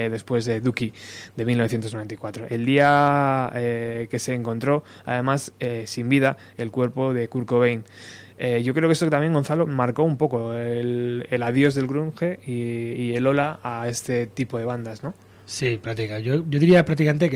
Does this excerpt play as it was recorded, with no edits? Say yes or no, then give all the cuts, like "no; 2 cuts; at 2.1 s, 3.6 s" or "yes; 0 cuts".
yes; 0 cuts